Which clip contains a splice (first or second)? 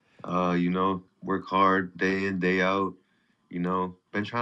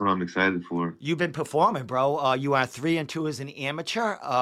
first